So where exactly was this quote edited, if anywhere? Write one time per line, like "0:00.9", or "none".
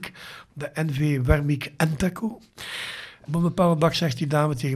0:03.3